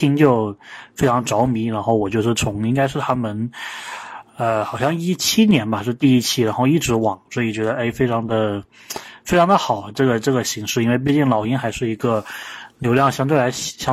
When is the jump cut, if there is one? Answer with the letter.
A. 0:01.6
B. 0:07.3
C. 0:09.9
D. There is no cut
B